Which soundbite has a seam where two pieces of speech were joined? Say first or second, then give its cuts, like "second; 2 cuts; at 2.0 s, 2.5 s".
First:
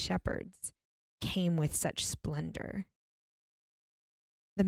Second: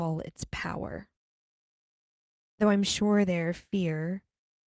second; 1 cut; at 2.4 s